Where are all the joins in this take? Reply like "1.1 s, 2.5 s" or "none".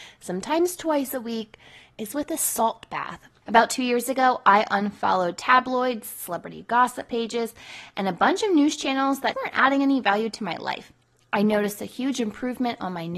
3.4 s, 9.3 s

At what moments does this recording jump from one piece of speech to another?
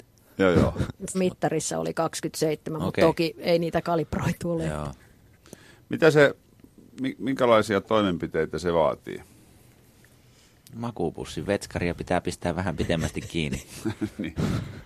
1.1 s

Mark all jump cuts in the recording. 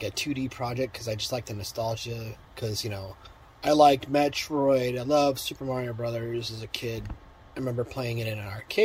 2.4 s

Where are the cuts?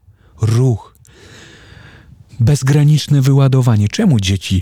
none

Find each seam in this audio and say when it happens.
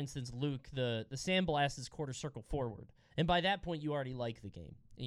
3.1 s

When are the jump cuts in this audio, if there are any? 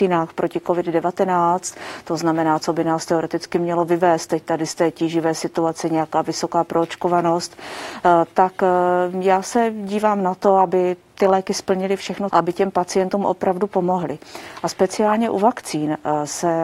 2.6 s, 12.3 s

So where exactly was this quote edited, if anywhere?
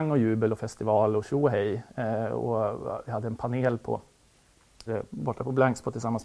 4.9 s

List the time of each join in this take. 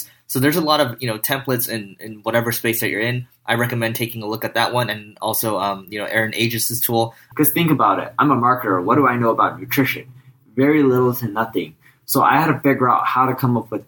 7.3 s

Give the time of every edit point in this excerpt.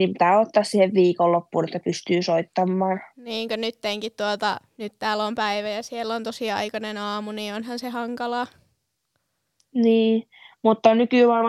none

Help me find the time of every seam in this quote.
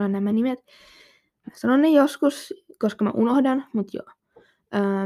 none

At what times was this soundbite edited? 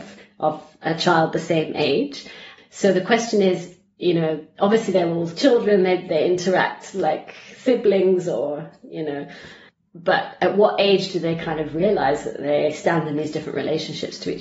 none

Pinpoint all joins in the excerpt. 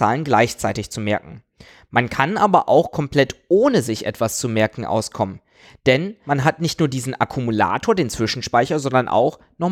none

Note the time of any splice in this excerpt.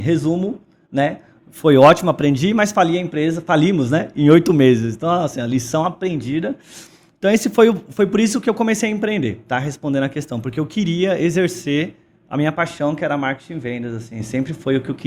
none

